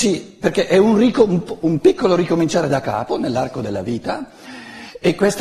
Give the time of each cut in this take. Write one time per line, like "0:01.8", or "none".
none